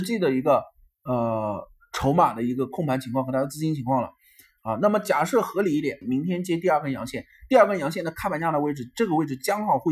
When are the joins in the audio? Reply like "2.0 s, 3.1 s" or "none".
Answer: 6.0 s